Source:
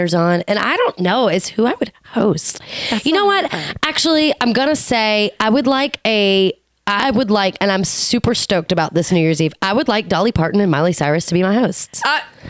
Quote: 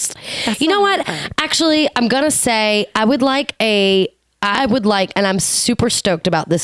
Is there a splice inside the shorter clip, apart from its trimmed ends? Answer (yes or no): no